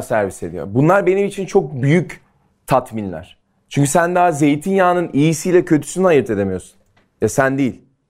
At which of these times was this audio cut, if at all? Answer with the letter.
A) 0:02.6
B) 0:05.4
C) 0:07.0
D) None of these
D